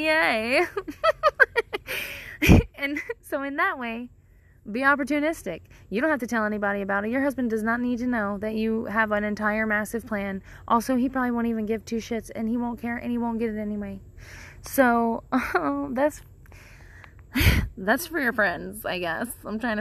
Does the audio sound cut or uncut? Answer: uncut